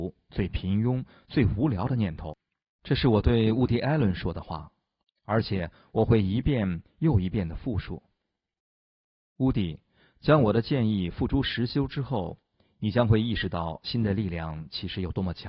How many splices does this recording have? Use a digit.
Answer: 1